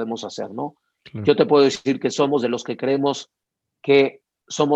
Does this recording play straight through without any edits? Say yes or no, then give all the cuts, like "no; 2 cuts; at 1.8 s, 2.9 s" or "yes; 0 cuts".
yes; 0 cuts